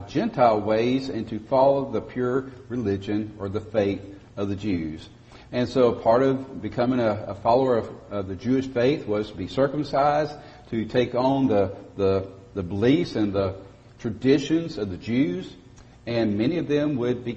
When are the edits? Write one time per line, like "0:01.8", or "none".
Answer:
0:05.4